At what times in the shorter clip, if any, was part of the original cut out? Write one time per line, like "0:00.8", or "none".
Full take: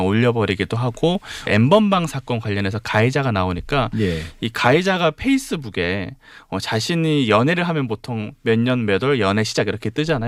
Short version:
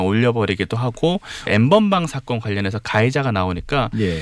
none